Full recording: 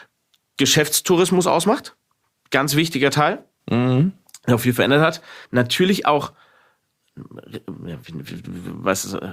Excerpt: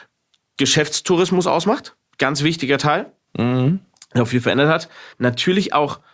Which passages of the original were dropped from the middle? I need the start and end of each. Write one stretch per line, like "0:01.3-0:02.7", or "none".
0:02.0-0:02.4